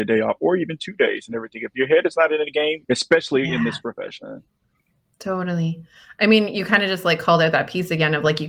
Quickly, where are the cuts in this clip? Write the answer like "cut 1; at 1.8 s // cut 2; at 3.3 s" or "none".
cut 1; at 2.8 s